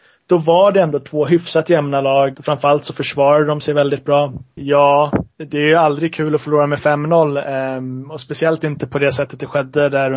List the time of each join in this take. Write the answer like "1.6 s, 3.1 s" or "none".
2.3 s, 4.6 s